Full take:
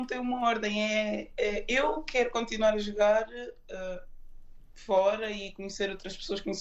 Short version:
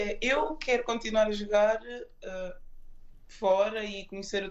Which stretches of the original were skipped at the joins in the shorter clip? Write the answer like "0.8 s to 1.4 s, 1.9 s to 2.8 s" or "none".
none